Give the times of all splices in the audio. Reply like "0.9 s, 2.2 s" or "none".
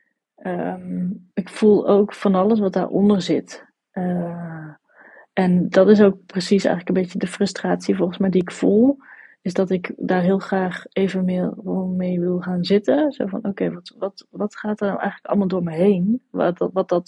none